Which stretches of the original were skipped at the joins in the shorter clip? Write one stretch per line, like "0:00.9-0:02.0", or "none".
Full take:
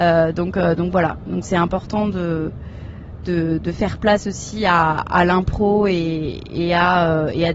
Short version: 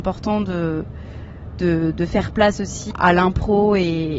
0:04.6-0:05.0